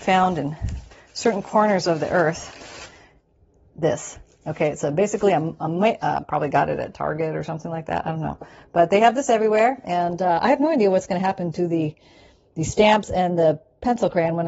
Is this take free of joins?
no; 1 cut; at 6.2 s

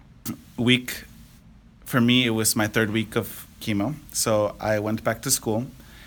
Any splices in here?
no; 0 cuts

